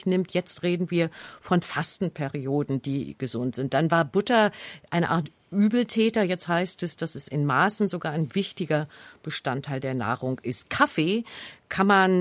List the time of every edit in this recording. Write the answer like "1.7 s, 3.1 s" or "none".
none